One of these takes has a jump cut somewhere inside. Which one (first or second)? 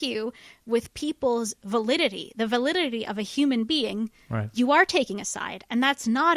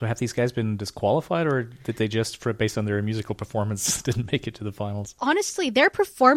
second